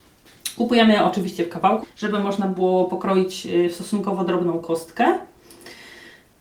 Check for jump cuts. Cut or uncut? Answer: cut